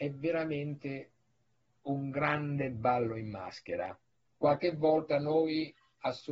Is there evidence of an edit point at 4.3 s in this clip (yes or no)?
yes